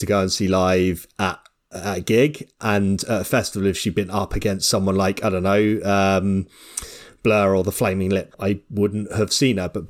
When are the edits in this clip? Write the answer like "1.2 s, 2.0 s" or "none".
8.3 s